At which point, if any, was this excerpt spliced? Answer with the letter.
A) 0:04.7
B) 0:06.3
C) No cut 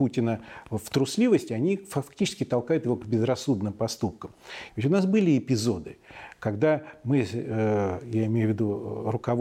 A